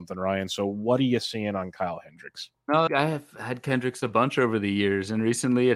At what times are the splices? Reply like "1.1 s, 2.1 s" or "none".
2.9 s